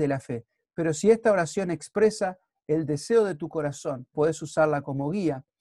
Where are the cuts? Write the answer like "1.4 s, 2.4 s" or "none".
4.1 s